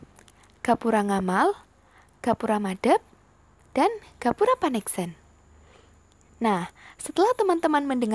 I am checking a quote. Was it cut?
no; 0 cuts

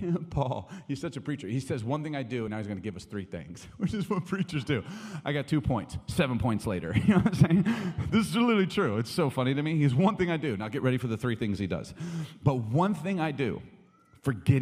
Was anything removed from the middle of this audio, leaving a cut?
no; 0 cuts

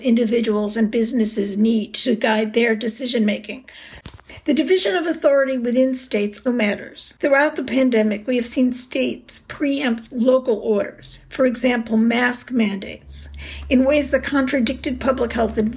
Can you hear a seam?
yes; 1 cut; at 6.5 s

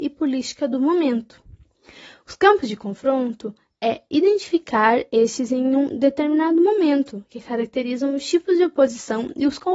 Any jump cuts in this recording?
no; 0 cuts

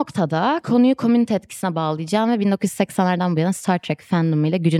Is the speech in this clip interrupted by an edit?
no; 0 cuts

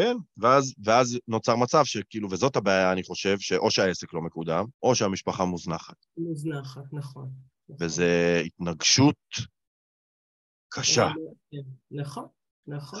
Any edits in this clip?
yes; 1 cut; at 4.7 s

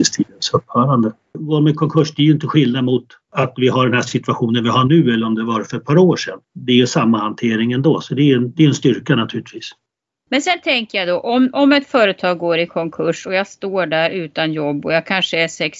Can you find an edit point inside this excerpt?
no; 0 cuts

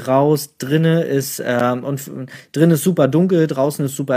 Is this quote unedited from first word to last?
yes; 0 cuts

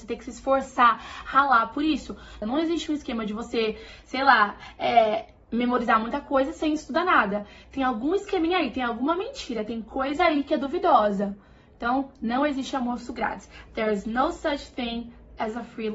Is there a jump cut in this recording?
yes; 1 cut; at 2.4 s

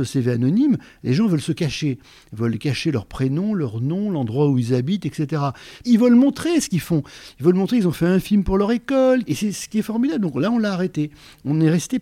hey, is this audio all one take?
no; 2 cuts; at 5.8 s, 9.3 s

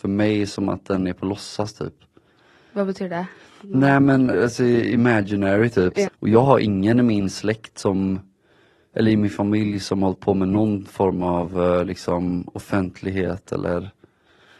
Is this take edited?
yes; 2 cuts; at 4.3 s, 6.0 s

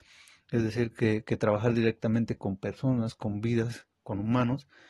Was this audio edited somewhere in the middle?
no; 0 cuts

